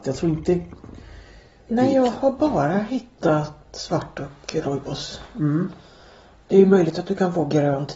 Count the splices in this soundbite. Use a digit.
1